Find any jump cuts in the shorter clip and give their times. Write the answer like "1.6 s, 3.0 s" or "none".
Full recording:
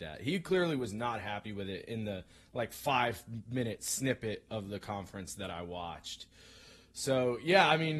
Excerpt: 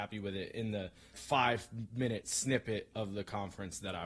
1.1 s